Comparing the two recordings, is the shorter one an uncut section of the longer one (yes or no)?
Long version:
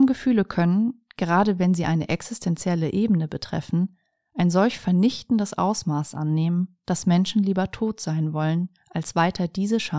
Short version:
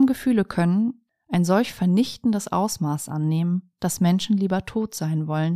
no